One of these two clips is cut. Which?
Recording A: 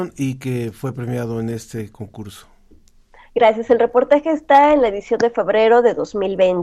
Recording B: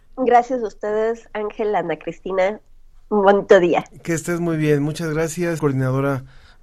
B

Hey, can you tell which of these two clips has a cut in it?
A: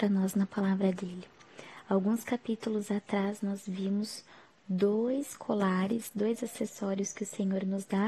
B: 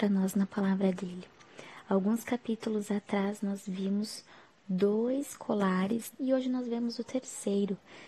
B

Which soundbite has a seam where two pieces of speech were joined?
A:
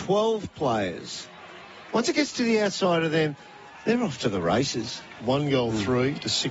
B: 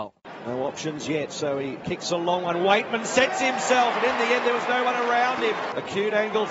A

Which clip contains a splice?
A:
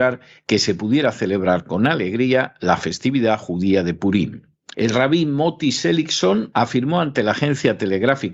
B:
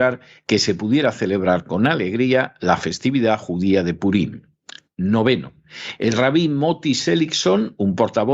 A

